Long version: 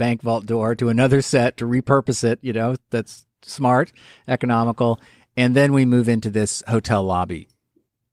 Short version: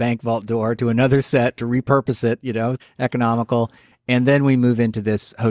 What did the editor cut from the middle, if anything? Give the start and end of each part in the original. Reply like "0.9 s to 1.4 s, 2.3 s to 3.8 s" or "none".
2.8 s to 4.1 s